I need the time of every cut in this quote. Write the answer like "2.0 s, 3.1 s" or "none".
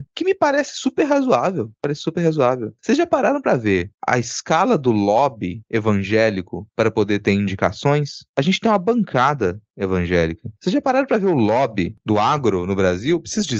none